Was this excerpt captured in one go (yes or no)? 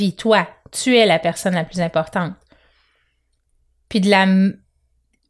yes